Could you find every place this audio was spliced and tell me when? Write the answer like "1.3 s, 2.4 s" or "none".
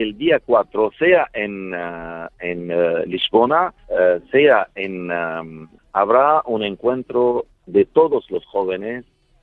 3.8 s, 5.8 s